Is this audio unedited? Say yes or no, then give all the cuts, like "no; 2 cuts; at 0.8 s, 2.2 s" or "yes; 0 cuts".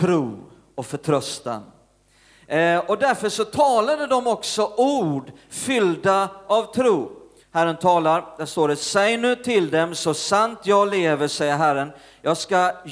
no; 1 cut; at 7.4 s